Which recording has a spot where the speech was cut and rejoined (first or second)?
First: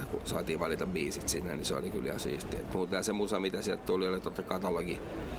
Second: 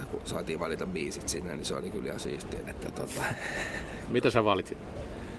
second